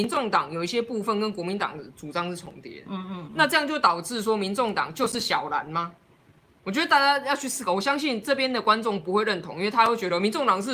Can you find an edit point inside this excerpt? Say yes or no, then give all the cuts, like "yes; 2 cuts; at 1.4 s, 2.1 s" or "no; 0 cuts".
no; 0 cuts